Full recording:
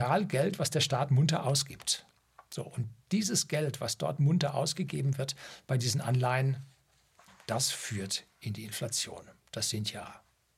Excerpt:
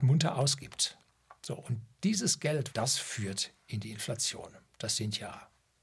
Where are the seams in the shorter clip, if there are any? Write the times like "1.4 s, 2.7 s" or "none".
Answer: 2.7 s